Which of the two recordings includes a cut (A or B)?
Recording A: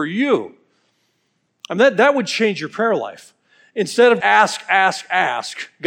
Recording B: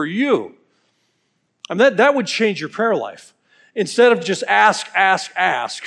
A